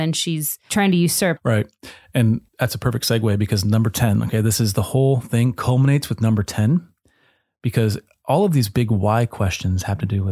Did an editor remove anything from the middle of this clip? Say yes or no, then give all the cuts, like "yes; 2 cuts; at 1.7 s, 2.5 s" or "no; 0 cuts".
yes; 2 cuts; at 1.4 s, 2.5 s